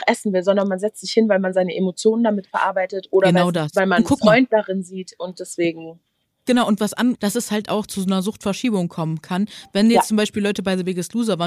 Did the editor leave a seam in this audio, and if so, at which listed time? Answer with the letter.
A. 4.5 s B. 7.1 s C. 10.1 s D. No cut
B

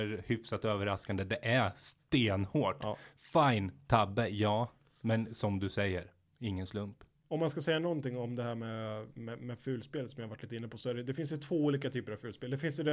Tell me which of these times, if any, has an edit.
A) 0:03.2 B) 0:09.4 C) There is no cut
C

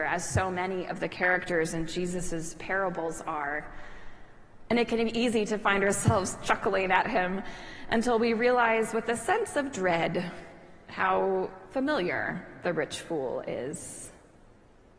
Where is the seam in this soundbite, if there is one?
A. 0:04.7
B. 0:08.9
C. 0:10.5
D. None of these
D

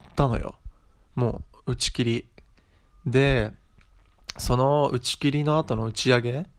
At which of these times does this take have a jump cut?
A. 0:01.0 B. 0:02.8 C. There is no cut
C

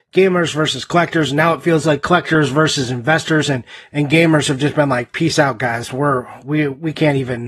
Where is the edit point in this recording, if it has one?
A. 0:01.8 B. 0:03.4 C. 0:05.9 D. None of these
D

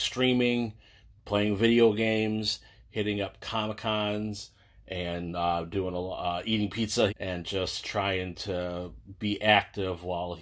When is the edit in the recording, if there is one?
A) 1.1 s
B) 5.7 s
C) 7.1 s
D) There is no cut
C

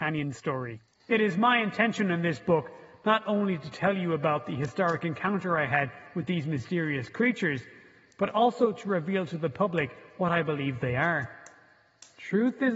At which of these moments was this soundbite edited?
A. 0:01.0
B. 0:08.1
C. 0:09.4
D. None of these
A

